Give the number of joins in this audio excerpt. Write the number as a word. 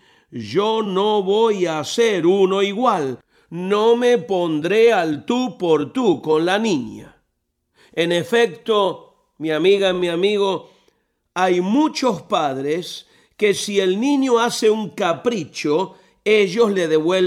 zero